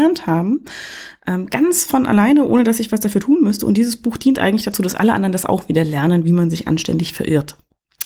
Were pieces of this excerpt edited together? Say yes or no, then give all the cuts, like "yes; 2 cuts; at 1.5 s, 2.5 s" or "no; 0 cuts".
no; 0 cuts